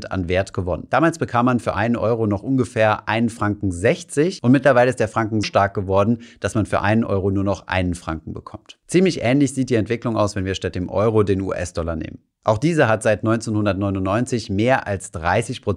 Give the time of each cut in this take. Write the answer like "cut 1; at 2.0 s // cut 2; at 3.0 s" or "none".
cut 1; at 5.4 s